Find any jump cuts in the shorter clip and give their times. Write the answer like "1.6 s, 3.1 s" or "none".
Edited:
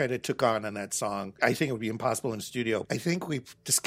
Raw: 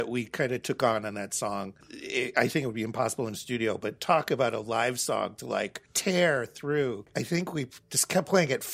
1.4 s, 2.8 s